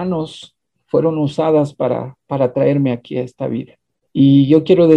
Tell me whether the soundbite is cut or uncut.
uncut